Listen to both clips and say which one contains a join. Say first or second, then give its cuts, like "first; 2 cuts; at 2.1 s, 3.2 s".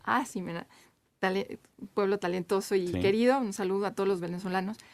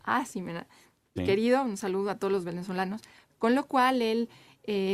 second; 2 cuts; at 1.2 s, 3.3 s